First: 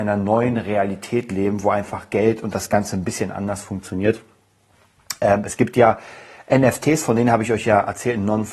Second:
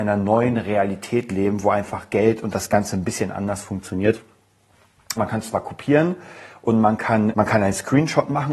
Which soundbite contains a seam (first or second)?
second